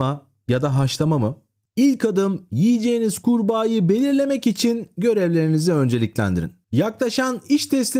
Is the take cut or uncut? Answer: uncut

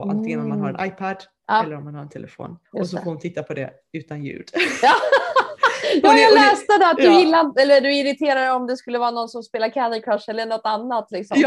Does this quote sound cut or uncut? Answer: cut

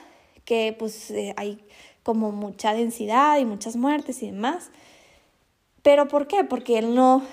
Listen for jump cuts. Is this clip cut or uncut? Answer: uncut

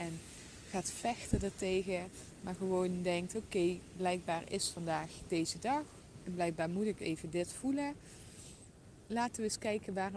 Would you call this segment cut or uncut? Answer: uncut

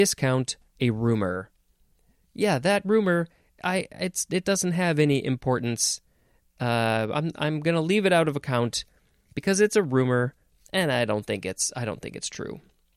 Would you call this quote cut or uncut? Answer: uncut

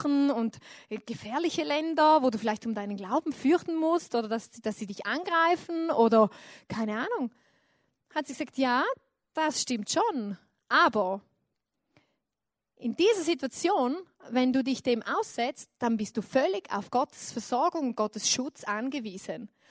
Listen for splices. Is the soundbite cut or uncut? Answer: uncut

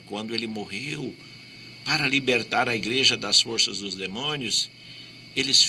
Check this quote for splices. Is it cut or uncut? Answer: uncut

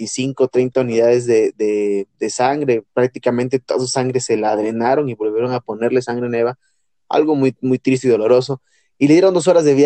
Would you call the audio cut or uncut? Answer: uncut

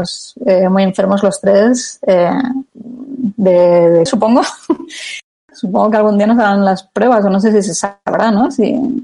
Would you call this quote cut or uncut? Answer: cut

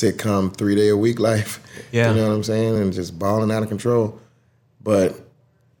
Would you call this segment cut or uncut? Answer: uncut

